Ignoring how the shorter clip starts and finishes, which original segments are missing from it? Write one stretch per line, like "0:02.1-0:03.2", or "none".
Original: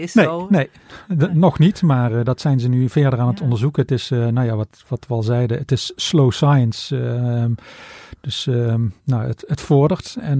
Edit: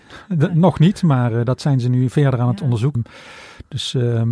0:03.7-0:07.5